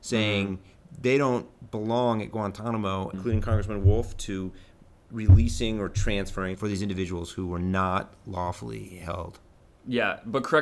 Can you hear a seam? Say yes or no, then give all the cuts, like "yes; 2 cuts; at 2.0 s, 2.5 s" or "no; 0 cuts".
yes; 2 cuts; at 3.1 s, 6.5 s